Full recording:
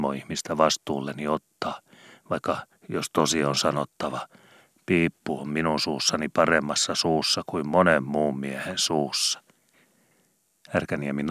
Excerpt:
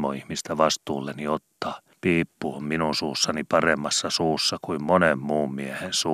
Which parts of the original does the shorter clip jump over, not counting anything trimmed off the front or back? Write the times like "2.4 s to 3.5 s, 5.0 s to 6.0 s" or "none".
1.9 s to 4.8 s